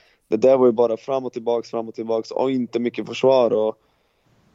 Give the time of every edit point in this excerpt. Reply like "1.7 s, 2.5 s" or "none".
none